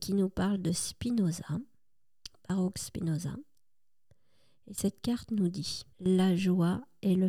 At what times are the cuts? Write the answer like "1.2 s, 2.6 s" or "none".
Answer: 5.9 s

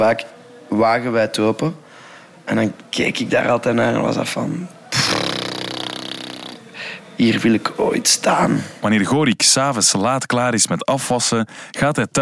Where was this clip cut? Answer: 2.4 s

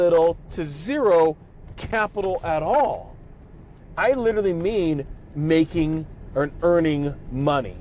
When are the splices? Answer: 4.0 s

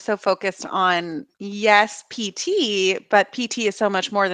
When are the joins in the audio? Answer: 1.3 s

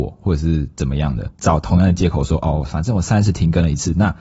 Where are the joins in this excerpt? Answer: 1.3 s

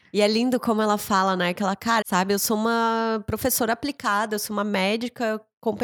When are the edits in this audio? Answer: 2.0 s

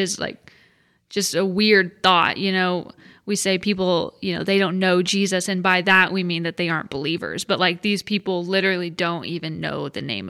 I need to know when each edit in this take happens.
none

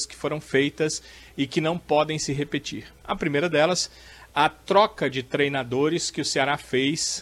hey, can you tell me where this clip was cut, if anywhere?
none

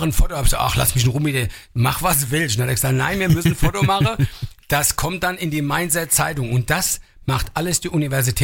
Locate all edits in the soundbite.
none

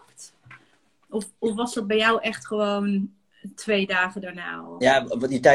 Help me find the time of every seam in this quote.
none

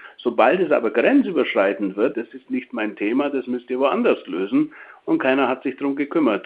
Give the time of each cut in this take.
2.1 s

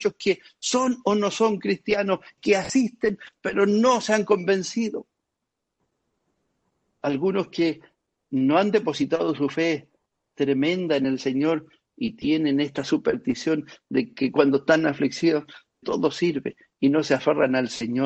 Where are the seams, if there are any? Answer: 2.4 s, 15.8 s

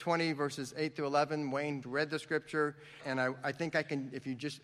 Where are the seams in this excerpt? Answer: 1.8 s, 3.0 s

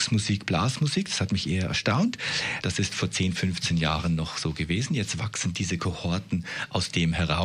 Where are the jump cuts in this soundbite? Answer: 2.6 s

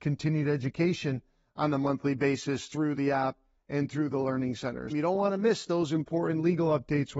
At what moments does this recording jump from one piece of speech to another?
4.9 s

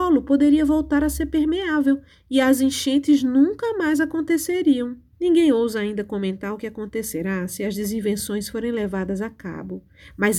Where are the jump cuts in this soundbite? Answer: 5.1 s

